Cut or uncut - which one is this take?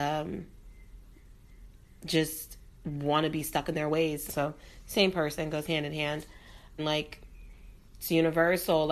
cut